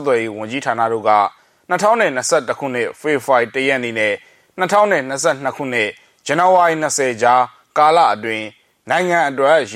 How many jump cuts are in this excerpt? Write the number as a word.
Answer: zero